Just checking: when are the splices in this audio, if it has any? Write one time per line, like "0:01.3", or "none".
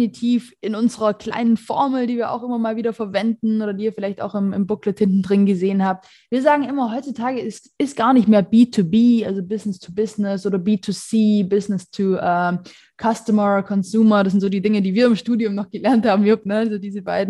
none

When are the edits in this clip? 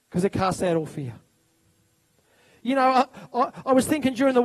none

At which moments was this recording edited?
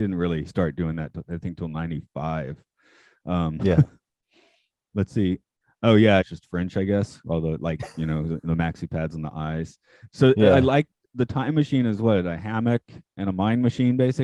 0:06.2

